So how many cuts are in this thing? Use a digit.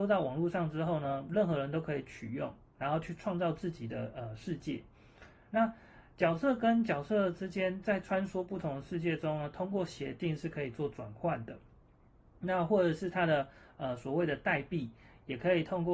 0